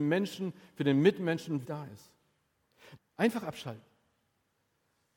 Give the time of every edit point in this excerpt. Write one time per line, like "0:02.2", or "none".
0:01.6
0:03.0